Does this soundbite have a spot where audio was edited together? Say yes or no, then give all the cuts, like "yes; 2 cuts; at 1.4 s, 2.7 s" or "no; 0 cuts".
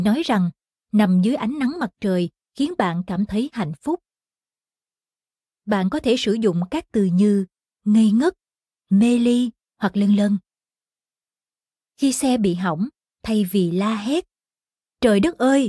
no; 0 cuts